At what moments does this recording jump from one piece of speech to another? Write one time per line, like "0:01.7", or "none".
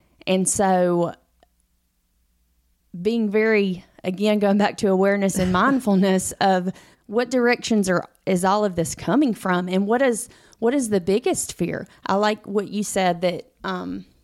0:06.9